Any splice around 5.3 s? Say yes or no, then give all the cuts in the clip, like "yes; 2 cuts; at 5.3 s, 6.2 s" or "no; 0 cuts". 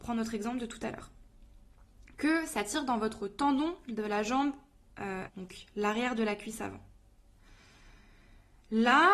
yes; 1 cut; at 5.3 s